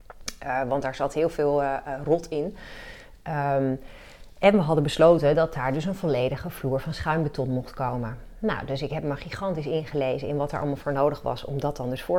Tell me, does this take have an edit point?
no; 0 cuts

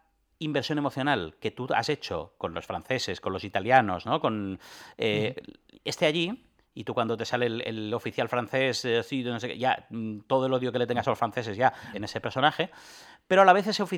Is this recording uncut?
no; 1 cut; at 11.9 s

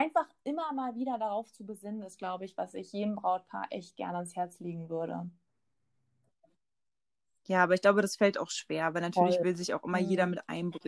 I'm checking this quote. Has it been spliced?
no; 0 cuts

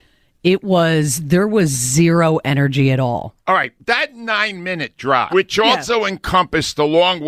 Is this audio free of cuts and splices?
no; 1 cut; at 5.3 s

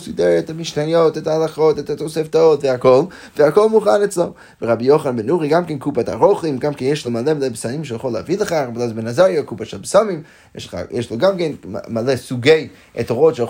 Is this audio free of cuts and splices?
yes; 0 cuts

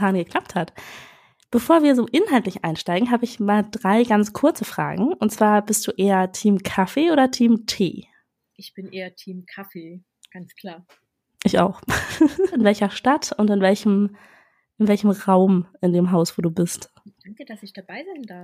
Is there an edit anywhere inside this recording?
yes; 2 cuts; at 12.5 s, 17.2 s

